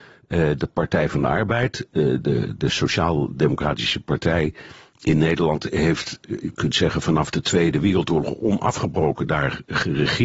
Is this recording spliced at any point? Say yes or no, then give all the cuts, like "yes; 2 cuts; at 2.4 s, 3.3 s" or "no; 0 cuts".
no; 0 cuts